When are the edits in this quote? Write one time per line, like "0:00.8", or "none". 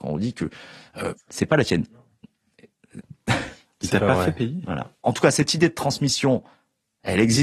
0:01.1
0:03.0
0:05.0